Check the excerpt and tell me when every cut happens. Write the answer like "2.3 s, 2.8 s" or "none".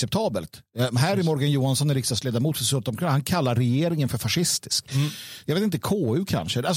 none